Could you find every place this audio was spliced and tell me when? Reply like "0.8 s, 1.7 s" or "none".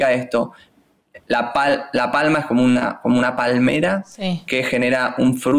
none